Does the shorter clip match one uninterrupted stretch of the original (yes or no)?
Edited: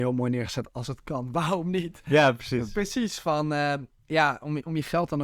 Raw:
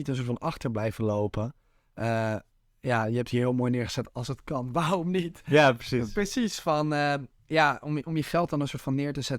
yes